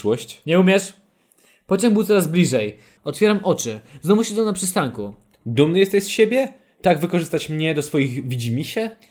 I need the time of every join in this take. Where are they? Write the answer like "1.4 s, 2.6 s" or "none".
3.0 s